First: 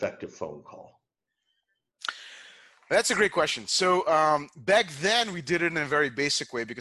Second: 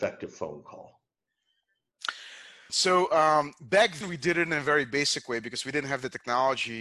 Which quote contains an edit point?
second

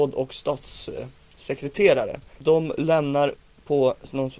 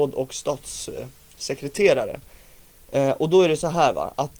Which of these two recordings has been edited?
first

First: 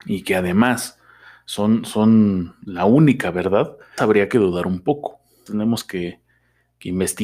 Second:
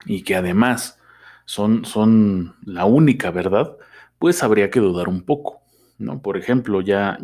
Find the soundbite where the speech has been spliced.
first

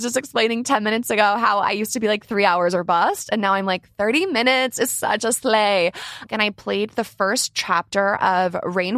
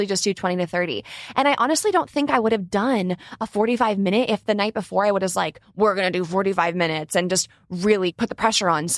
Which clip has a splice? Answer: first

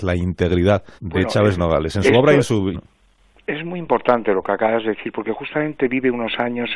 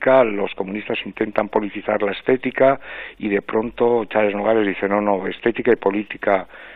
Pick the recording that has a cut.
first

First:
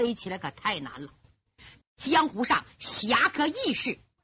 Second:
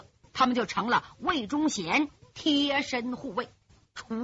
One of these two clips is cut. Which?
first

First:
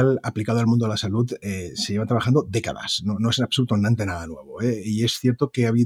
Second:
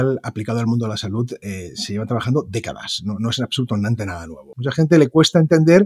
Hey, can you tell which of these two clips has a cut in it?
second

